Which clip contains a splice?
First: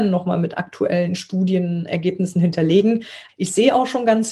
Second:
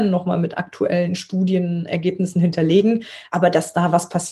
first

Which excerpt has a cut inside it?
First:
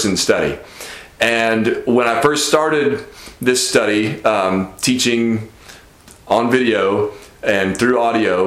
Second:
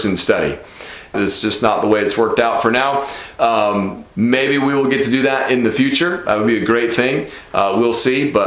second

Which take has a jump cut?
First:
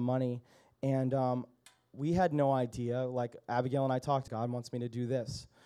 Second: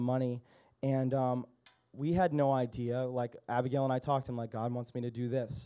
first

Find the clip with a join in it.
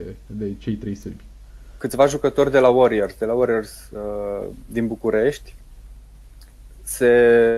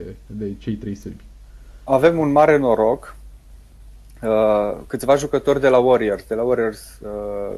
first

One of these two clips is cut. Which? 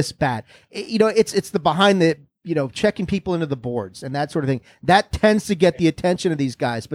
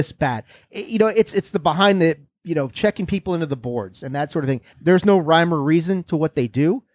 second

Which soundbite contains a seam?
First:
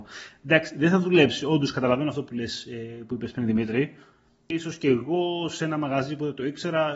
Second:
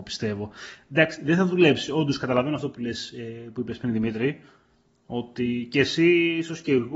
first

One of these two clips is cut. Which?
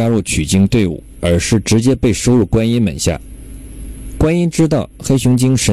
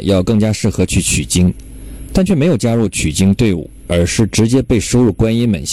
second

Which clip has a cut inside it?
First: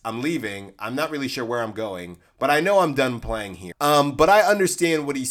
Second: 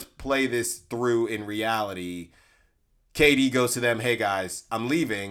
first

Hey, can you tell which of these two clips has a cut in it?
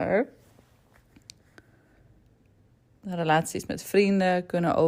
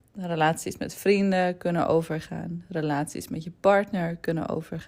first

